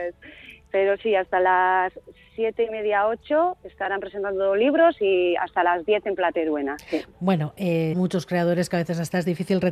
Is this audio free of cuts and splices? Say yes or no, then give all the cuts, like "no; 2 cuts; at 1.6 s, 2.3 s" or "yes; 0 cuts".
no; 1 cut; at 7.9 s